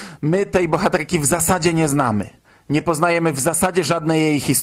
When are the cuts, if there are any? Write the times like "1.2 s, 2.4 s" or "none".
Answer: none